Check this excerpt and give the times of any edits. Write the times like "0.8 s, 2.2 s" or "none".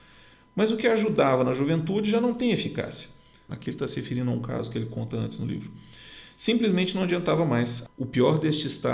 3.5 s, 7.9 s